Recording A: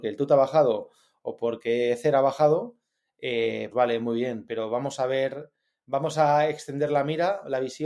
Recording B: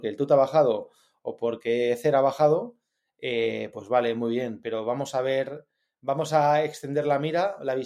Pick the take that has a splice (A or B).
A